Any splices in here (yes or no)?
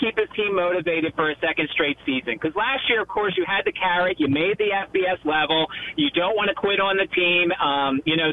no